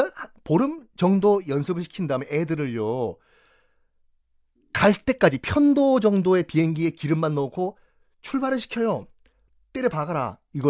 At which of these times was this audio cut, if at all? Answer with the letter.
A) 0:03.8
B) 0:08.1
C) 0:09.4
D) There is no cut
D